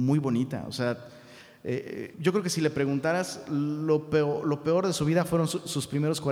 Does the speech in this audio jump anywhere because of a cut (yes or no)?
yes